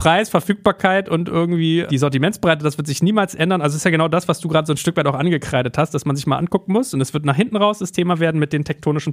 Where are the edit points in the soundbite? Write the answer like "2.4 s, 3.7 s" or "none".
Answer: none